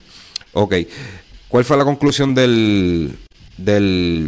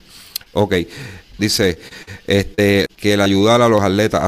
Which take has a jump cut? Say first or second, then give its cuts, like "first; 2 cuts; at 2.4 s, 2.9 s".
second; 2 cuts; at 1.4 s, 2.9 s